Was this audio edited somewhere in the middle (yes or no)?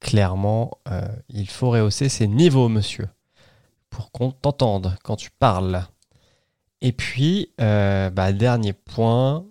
no